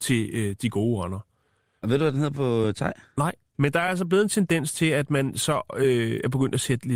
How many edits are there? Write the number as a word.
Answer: one